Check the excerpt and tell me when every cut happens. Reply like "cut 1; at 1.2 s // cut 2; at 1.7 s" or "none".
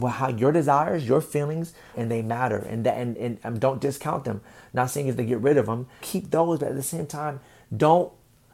cut 1; at 1.9 s // cut 2; at 6.0 s